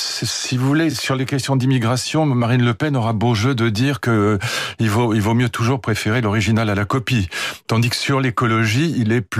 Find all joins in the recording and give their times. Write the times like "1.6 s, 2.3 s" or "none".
none